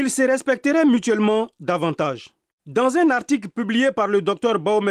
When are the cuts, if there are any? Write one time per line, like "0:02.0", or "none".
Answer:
0:02.6

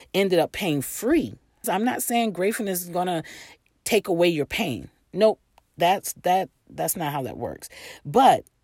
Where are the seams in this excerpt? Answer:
0:01.6

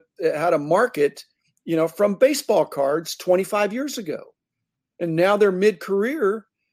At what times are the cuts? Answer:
none

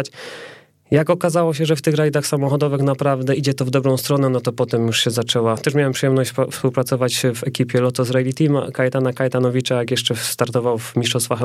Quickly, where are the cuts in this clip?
none

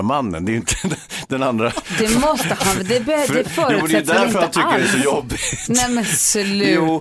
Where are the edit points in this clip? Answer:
none

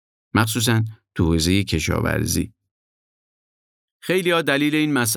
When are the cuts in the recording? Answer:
0:03.8

